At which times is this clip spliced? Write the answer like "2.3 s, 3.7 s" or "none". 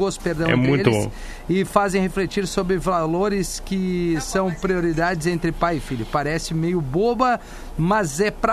none